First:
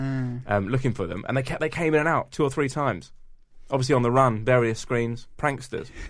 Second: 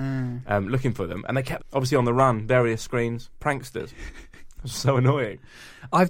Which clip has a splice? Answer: second; 1 cut; at 1.6 s

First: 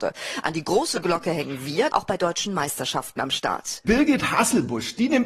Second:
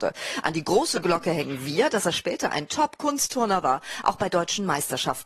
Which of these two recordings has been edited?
first; 2 cuts; at 1.9 s, 3.8 s

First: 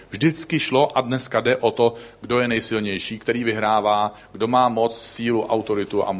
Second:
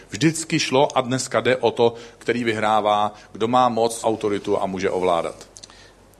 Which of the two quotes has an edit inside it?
second; 2 cuts; at 2.2 s, 4.0 s

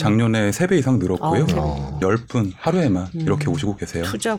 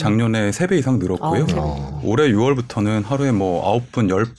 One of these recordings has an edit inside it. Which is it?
first; 1 cut; at 2.0 s

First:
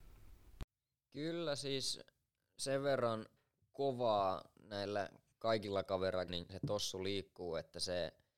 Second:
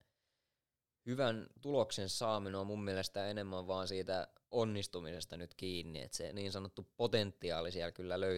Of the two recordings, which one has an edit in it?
first; 2 cuts; at 1.0 s, 6.3 s

